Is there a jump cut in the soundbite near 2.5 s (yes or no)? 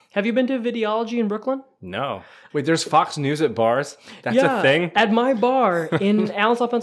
yes